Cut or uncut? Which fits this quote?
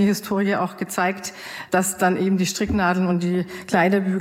uncut